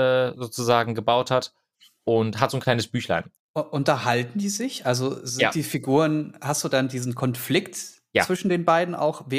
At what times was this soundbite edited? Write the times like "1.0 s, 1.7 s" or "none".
3.4 s